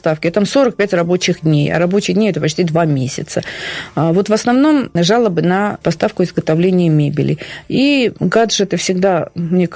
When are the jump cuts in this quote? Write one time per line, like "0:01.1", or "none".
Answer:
none